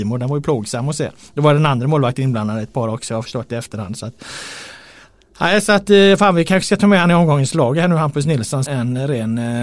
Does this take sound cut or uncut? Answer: cut